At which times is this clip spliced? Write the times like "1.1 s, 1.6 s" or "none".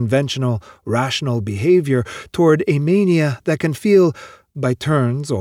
none